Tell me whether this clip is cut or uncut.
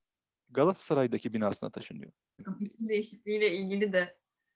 cut